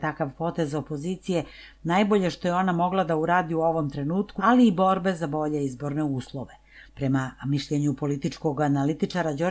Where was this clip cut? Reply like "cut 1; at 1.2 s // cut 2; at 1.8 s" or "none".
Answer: cut 1; at 4.4 s // cut 2; at 6.9 s